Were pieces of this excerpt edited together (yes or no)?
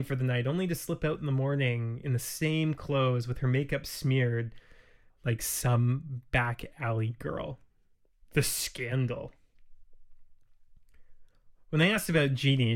yes